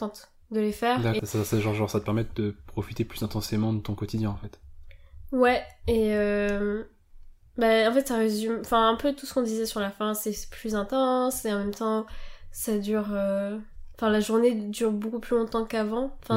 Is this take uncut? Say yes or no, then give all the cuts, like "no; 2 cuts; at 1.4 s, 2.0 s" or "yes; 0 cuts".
no; 1 cut; at 1.2 s